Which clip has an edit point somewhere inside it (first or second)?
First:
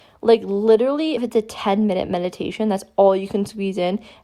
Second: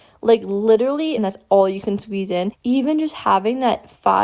second